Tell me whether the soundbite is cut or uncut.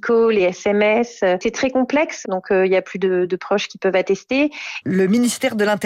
cut